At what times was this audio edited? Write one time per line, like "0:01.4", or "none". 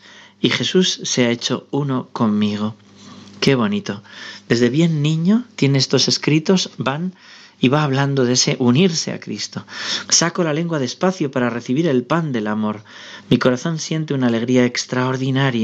0:10.1